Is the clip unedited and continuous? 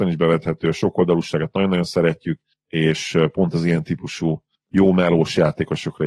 yes; 0 cuts

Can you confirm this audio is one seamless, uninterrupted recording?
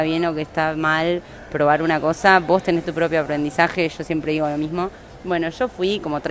yes; 0 cuts

